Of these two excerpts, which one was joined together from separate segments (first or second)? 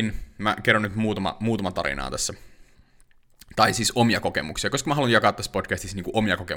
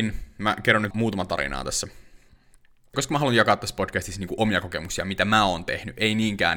second